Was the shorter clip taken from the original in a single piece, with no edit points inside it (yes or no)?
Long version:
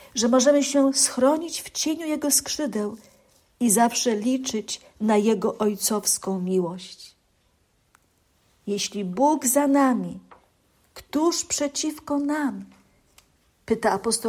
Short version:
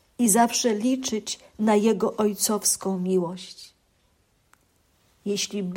yes